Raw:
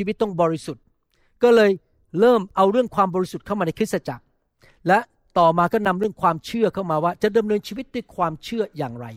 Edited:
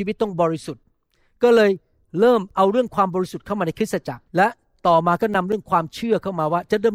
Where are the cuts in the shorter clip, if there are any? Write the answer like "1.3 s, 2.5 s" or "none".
4.3 s